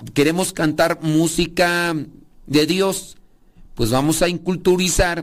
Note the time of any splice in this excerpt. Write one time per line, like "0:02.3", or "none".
none

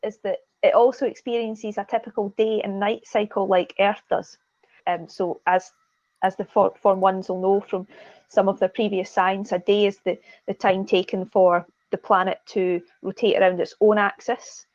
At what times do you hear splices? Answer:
0:04.8

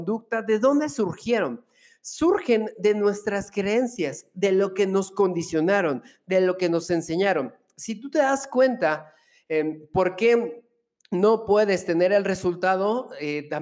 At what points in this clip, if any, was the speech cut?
none

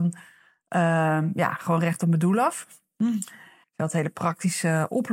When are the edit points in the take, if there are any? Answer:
0:03.6

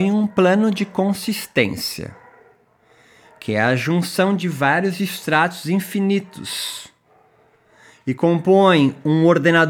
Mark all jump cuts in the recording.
none

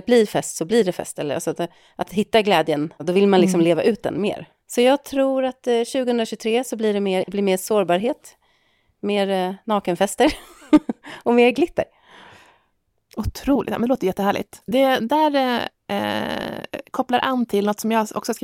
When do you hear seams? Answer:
0:07.2

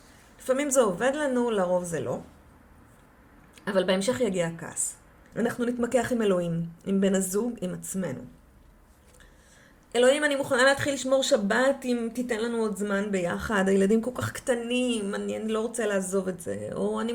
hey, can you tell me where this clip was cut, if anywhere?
0:05.3

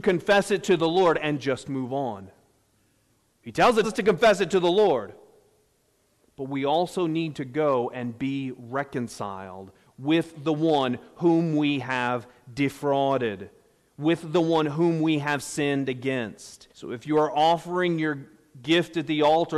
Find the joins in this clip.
0:03.8
0:16.7

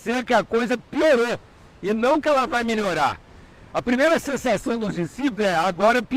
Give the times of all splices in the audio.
none

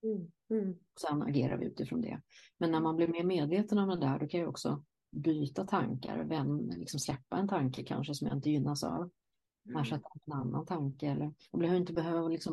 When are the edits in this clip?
none

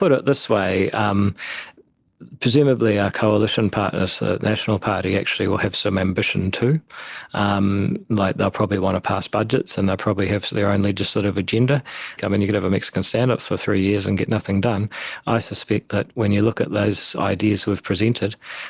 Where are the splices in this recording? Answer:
0:12.2

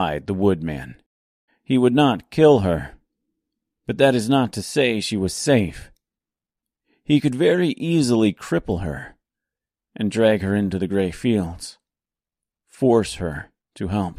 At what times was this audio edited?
0:01.5

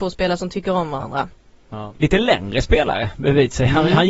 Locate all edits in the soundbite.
0:01.9

